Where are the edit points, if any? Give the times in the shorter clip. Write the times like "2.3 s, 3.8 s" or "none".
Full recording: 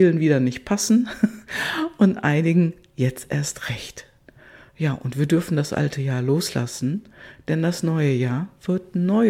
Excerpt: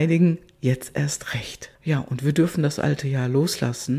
1.8 s